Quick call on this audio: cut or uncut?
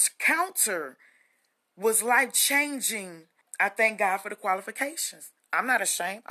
cut